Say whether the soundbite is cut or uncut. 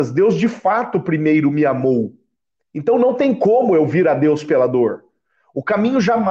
uncut